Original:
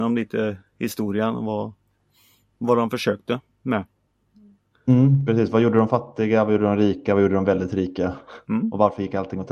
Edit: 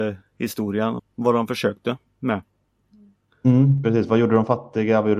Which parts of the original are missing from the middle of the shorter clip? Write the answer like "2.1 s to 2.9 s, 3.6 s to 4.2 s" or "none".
1.4 s to 2.4 s